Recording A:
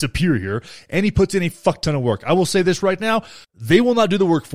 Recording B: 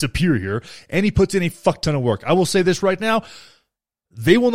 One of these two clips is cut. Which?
A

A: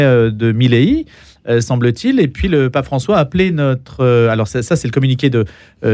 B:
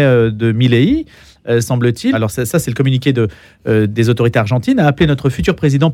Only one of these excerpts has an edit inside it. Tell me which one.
B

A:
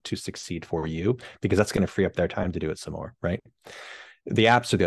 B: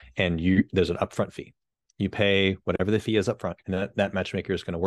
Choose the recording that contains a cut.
B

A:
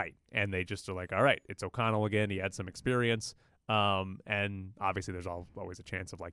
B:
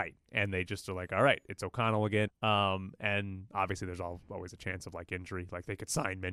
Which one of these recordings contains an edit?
B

